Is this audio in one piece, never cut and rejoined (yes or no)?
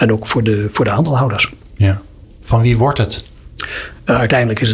yes